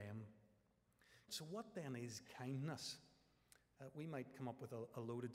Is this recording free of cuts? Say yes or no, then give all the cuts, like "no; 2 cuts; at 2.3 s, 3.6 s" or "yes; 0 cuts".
no; 1 cut; at 1.3 s